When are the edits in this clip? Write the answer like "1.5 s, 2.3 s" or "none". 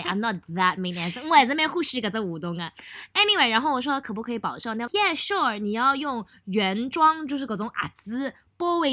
4.9 s